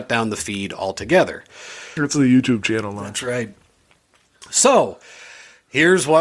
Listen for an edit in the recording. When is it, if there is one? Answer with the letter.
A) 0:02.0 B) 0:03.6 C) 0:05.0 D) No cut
A